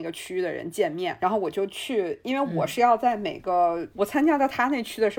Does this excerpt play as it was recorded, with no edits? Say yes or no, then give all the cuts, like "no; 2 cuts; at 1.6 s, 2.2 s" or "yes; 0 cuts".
no; 1 cut; at 3.9 s